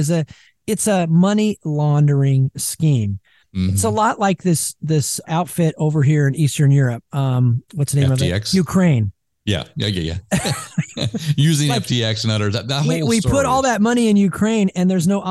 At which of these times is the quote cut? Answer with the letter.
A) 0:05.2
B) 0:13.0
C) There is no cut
A